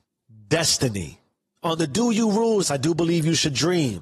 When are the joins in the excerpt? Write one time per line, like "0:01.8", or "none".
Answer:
0:01.6
0:02.6